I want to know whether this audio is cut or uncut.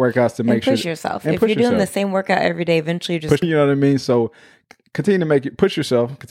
cut